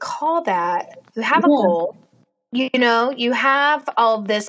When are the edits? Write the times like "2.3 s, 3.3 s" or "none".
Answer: 1.1 s